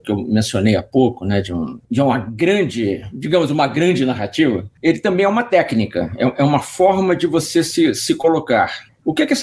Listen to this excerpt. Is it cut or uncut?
uncut